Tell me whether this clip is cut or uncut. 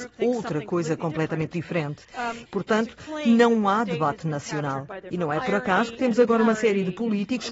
cut